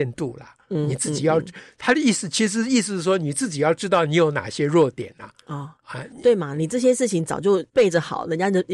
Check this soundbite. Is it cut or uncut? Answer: cut